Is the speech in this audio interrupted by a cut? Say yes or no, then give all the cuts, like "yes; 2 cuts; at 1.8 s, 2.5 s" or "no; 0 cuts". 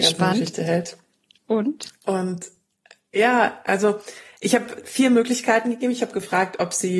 no; 0 cuts